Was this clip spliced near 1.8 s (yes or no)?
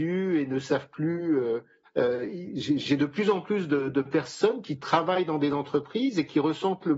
yes